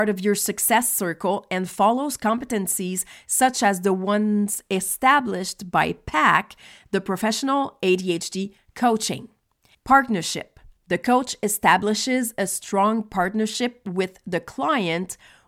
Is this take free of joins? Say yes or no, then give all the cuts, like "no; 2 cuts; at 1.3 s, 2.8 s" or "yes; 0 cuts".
no; 1 cut; at 9.7 s